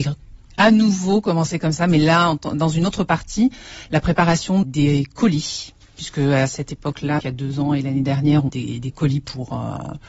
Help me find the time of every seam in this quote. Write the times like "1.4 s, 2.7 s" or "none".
4.6 s, 7.2 s, 8.5 s